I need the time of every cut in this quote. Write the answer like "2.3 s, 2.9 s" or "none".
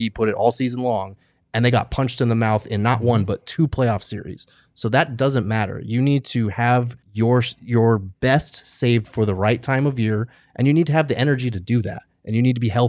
7.0 s